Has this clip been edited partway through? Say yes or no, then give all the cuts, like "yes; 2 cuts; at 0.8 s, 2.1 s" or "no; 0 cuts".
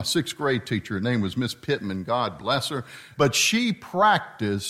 yes; 1 cut; at 3.1 s